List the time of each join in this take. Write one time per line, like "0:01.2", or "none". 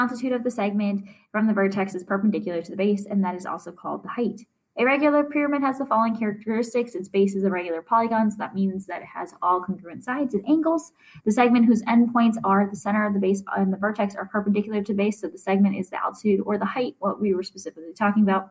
none